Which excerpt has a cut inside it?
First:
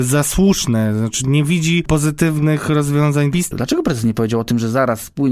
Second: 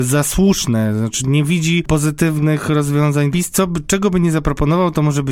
first; 1 cut; at 3.5 s

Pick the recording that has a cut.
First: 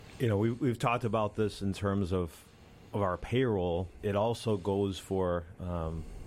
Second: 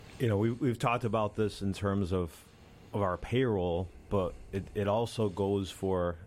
first; 1 cut; at 4.0 s

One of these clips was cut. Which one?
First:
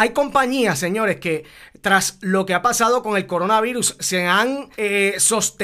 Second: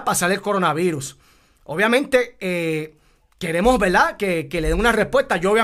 first; 1 cut; at 4.7 s

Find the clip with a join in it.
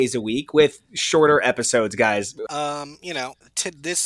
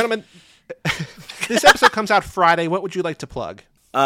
first; 1 cut; at 2.5 s

